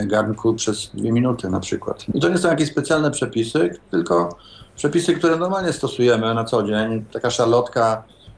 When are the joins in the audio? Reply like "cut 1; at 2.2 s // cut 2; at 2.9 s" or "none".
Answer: cut 1; at 2.1 s